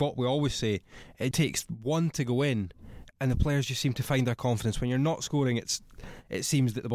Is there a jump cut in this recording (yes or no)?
yes